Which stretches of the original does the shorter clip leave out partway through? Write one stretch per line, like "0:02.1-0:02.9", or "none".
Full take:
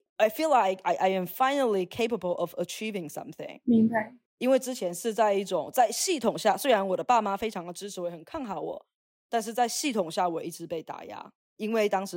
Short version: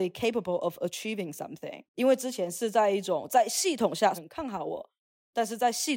0:03.6-0:04.3
0:06.6-0:08.1